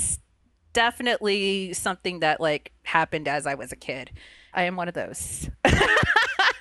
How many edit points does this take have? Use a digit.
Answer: 1